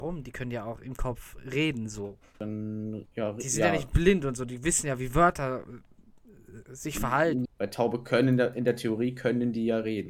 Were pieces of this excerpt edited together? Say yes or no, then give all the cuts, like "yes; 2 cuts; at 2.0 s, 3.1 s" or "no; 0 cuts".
yes; 1 cut; at 7.5 s